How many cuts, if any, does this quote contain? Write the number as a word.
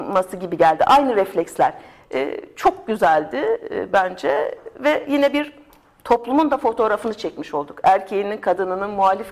one